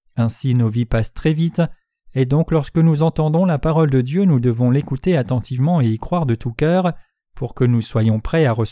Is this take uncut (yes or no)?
yes